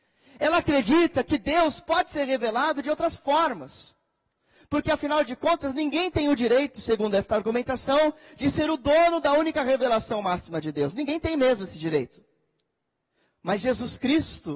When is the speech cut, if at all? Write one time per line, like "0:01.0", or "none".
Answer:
none